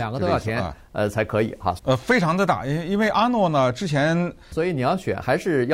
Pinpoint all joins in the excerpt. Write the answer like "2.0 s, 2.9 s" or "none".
1.8 s, 4.5 s